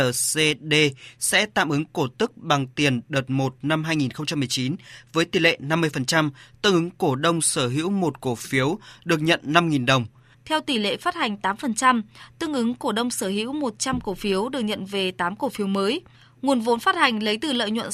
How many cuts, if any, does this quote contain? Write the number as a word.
one